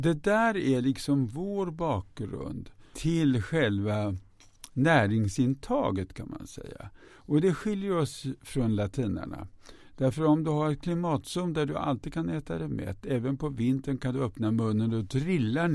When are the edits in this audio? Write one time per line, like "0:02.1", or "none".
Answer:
0:02.9